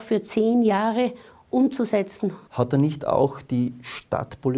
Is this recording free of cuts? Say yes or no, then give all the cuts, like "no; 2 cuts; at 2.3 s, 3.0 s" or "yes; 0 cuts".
no; 1 cut; at 2.5 s